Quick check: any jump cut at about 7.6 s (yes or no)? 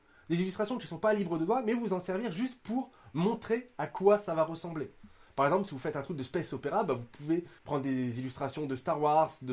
yes